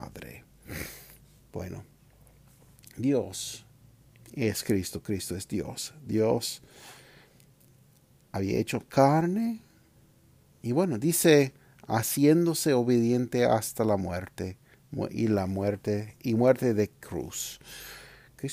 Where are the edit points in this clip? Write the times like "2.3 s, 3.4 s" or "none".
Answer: none

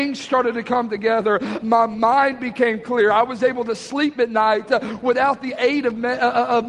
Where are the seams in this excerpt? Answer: 1.6 s

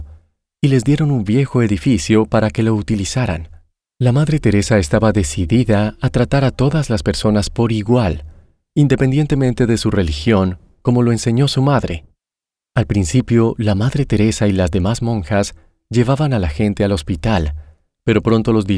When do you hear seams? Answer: 3.9 s, 12.5 s

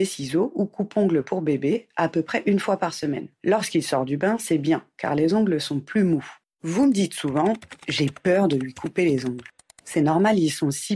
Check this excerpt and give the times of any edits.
6.4 s

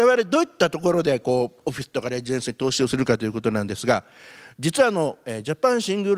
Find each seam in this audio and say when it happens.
none

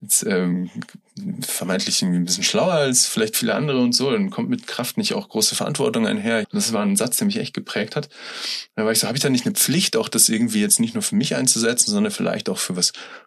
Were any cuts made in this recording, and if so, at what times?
6.4 s

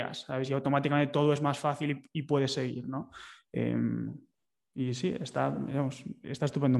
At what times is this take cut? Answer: none

